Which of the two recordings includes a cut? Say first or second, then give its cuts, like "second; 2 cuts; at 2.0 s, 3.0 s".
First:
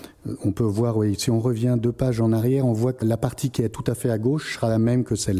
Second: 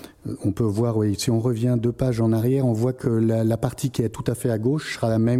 first; 1 cut; at 3.0 s